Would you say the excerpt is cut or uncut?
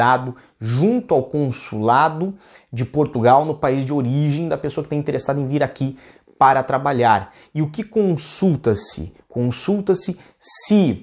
uncut